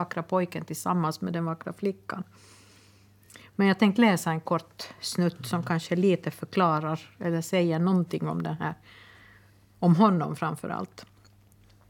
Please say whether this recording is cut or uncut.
uncut